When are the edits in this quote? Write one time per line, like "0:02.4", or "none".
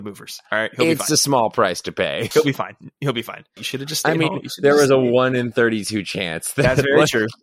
0:02.3
0:03.6

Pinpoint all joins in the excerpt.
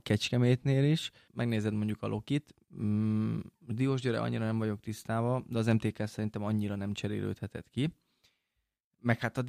0:01.3

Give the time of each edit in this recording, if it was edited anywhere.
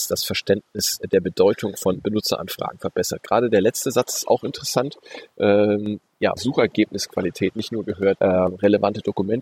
0:06.4
0:08.2

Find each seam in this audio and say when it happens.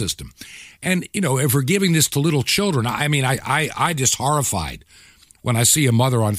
none

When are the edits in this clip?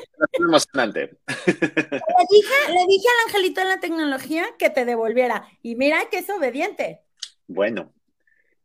0:07.4

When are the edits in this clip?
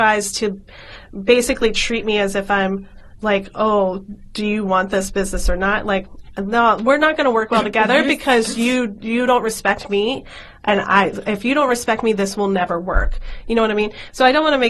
none

